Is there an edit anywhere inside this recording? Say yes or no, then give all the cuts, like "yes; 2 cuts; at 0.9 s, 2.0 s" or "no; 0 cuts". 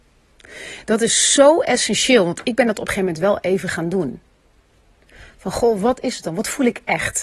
no; 0 cuts